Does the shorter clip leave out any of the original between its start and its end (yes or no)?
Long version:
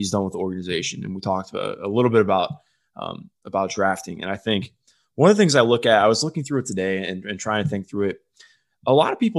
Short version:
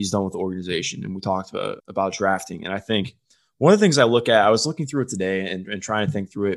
yes